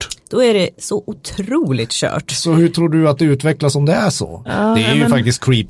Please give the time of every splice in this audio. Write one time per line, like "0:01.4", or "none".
0:04.5